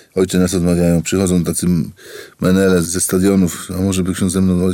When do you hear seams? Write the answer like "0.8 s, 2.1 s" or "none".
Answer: 2.8 s